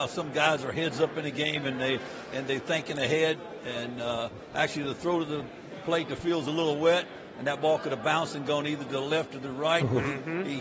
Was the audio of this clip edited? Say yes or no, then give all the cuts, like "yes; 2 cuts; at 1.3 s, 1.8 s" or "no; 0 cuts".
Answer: no; 0 cuts